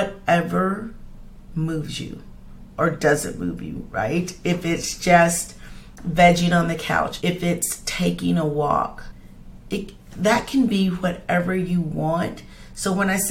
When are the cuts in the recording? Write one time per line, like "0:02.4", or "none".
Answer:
0:07.2